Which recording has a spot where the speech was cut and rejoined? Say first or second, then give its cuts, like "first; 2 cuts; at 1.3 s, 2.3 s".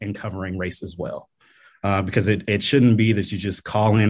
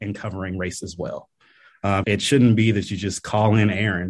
second; 1 cut; at 2.0 s